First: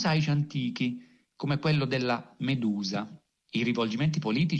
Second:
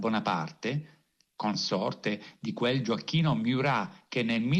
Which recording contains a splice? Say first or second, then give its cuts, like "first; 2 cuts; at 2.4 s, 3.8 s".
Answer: first; 1 cut; at 3.4 s